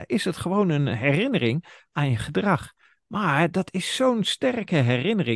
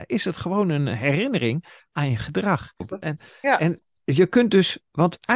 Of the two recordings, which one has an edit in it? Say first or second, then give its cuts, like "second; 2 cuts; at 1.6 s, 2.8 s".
second; 1 cut; at 2.8 s